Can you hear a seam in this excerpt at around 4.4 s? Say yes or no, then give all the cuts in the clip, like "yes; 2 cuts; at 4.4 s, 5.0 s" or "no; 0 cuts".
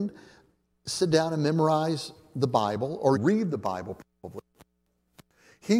no; 1 cut; at 3.1 s